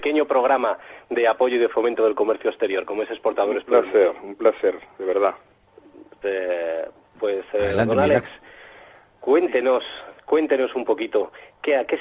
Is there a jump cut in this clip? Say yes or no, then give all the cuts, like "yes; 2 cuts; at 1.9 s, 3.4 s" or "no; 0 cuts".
yes; 1 cut; at 6.2 s